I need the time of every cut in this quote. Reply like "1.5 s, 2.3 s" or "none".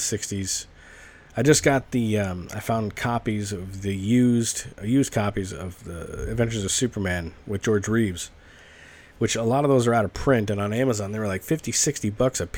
none